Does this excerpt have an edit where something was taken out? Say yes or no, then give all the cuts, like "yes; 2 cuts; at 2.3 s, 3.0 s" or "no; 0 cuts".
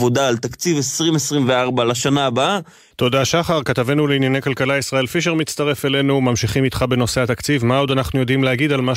yes; 1 cut; at 2.9 s